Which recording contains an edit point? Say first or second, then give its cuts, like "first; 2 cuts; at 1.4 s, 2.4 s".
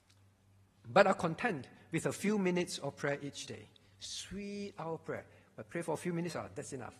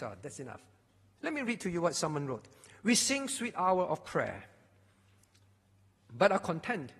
second; 1 cut; at 1.2 s